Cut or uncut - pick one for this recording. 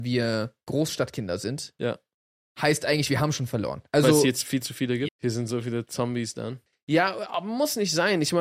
cut